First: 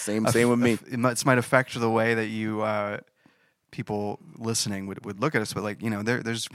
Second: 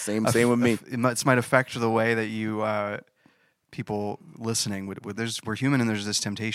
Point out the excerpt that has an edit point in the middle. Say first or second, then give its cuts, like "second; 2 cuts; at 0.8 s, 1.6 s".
second; 1 cut; at 5.1 s